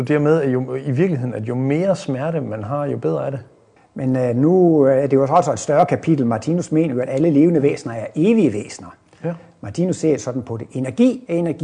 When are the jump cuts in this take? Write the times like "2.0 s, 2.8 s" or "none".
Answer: 3.8 s